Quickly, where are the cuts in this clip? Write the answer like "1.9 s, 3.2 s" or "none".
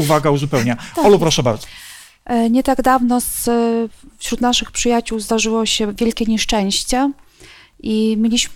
none